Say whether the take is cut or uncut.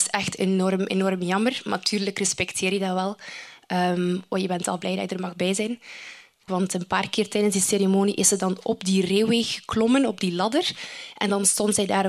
cut